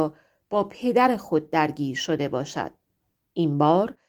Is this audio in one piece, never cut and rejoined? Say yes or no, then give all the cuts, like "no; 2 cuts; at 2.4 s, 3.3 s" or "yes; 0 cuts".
yes; 0 cuts